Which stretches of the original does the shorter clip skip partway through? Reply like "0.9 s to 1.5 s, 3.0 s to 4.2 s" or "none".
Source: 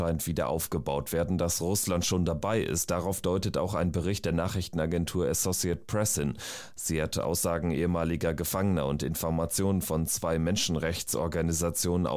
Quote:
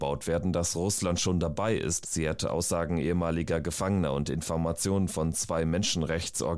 2.9 s to 6.7 s